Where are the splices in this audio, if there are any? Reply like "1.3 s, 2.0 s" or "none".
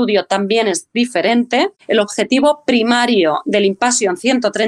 1.8 s